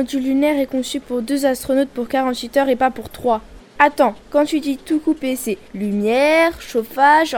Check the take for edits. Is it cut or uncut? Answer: cut